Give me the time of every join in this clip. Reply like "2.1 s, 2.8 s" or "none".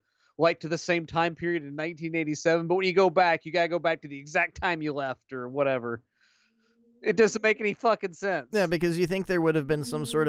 none